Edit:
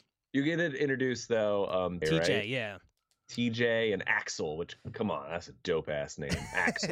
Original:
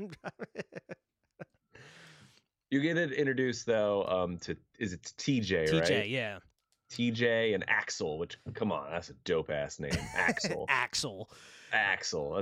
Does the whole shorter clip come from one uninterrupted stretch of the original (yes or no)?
no